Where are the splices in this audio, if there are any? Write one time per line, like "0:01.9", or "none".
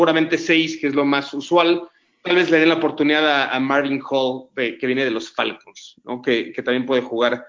none